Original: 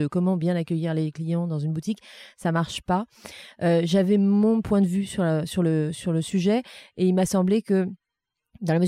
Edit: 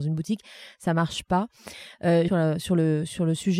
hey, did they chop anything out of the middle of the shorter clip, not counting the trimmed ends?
yes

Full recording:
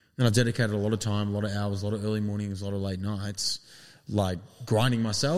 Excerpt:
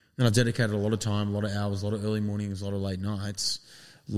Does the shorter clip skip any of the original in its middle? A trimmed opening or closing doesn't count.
no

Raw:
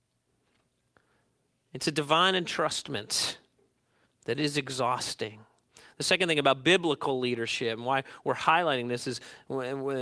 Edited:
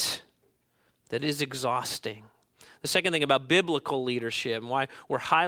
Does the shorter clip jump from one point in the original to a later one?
no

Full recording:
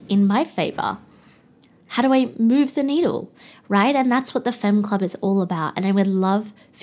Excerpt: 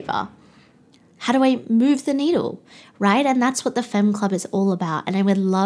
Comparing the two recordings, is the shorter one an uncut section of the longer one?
yes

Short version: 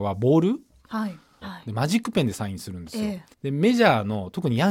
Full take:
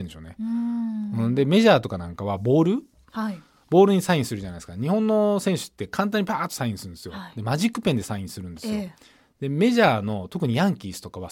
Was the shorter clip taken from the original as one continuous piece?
no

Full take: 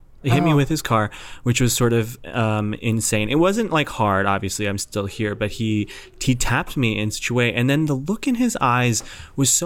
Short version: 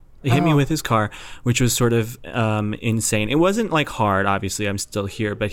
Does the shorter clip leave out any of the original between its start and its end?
no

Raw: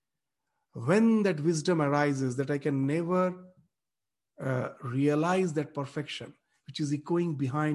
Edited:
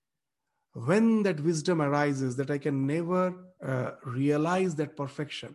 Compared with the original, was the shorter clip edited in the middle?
yes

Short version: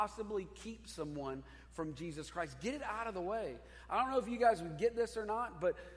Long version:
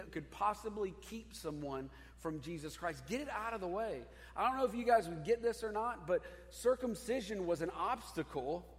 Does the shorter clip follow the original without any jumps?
yes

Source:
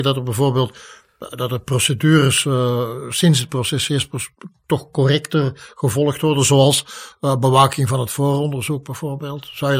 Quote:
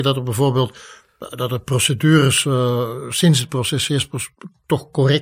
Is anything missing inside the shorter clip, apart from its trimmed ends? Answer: no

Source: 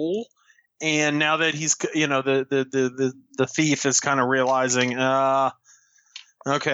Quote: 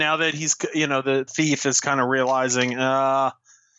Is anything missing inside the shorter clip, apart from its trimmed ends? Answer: yes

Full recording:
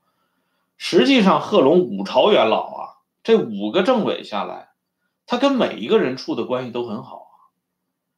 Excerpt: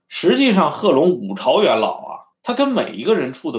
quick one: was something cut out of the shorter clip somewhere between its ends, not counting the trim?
yes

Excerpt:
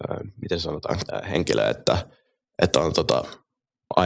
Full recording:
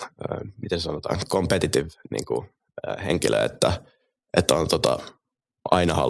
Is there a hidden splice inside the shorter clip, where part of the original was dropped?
yes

